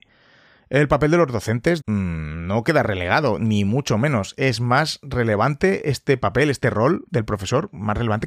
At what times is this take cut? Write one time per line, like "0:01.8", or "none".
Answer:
0:01.8